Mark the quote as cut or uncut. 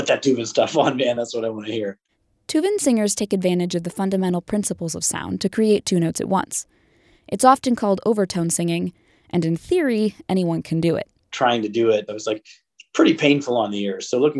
uncut